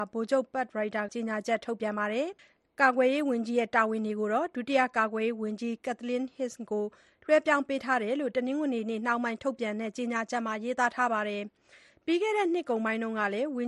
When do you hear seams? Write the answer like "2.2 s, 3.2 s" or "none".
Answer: 1.1 s, 2.4 s